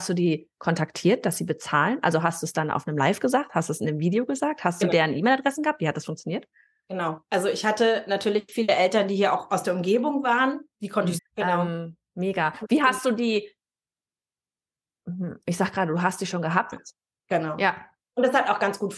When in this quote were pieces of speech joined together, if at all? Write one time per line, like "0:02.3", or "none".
0:11.2
0:16.7